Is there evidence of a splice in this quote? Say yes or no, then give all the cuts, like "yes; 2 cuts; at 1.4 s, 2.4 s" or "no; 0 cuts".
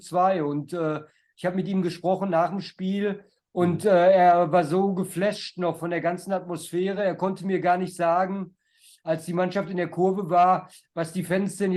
no; 0 cuts